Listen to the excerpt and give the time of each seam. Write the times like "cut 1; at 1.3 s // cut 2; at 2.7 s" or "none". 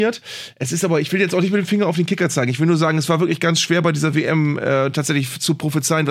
none